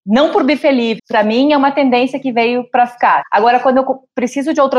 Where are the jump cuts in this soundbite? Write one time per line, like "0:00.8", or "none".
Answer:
0:01.0
0:03.2